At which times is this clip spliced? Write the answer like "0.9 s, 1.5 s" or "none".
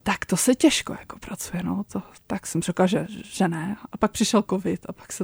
none